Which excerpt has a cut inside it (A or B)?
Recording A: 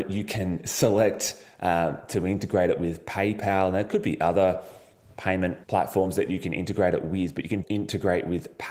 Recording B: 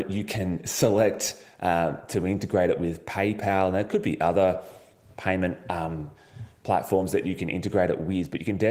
A